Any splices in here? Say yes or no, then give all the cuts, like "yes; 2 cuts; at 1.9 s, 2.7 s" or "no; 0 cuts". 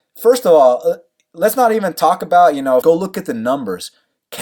yes; 1 cut; at 2.8 s